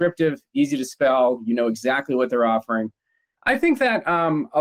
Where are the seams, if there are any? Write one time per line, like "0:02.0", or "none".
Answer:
0:03.4